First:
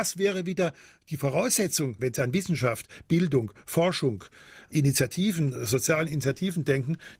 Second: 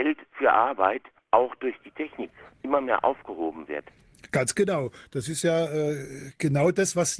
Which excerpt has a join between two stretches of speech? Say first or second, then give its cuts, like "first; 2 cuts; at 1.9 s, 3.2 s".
first; 1 cut; at 2.0 s